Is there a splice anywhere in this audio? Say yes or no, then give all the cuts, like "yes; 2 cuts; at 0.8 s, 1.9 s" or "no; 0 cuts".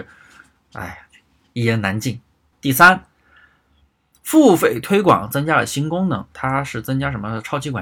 yes; 2 cuts; at 2.5 s, 6.3 s